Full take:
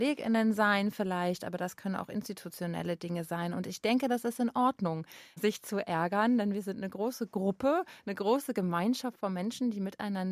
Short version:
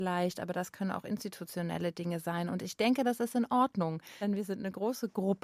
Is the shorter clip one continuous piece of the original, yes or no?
no